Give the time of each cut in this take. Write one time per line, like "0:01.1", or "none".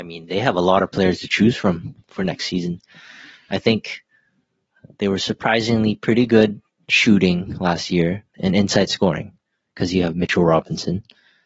0:08.3